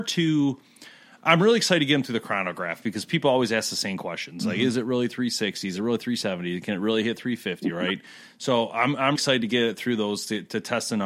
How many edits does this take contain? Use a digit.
1